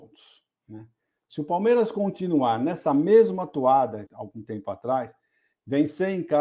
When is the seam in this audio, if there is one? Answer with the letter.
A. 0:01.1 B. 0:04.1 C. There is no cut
B